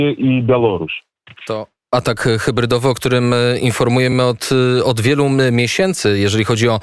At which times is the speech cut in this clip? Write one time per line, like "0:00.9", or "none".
none

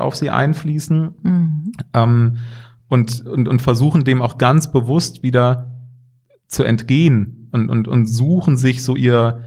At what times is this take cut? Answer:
none

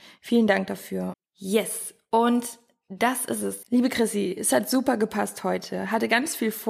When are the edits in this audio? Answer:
0:01.1
0:03.6

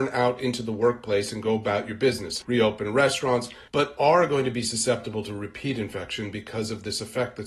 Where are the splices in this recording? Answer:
0:02.4
0:03.7

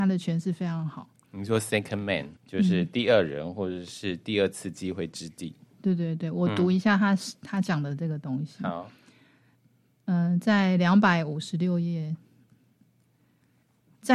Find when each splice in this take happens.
0:02.4

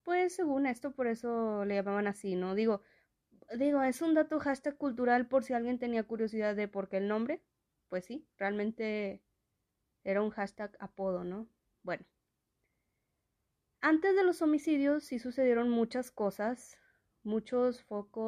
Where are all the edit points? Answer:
none

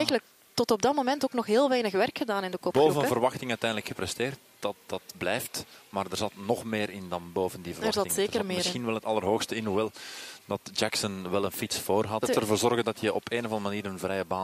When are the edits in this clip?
0:12.2

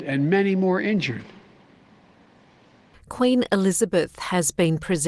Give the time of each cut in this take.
0:02.9

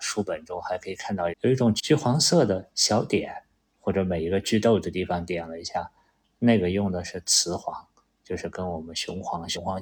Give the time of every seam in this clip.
0:01.3
0:03.7

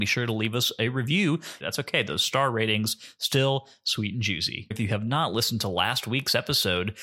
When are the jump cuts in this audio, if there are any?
0:01.6
0:04.7

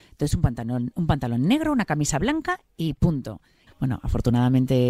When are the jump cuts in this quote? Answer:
0:03.7

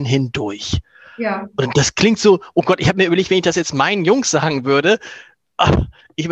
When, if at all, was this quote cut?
none

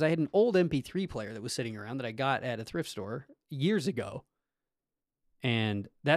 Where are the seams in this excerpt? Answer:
0:05.2

